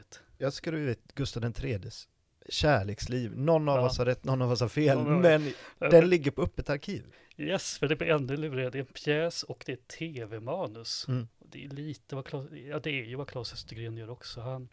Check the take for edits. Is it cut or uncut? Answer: cut